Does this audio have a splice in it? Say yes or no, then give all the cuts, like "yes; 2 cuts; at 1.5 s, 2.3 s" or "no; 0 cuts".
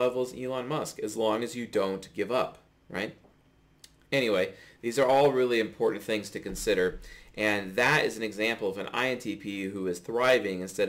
no; 0 cuts